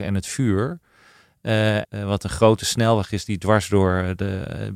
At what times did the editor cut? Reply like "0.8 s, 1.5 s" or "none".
1.8 s